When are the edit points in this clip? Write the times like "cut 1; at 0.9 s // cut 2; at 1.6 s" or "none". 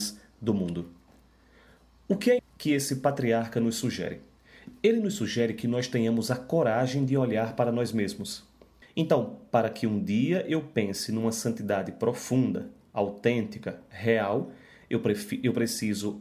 cut 1; at 2.4 s // cut 2; at 8.8 s